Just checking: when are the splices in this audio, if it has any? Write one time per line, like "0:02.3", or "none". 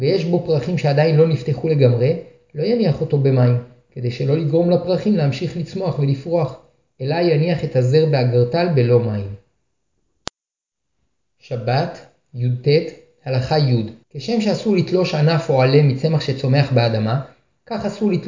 0:14.0